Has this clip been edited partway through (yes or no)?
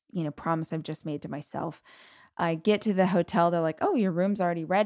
no